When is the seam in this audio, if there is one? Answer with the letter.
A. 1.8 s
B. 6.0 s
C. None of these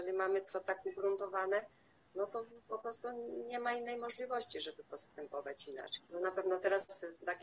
B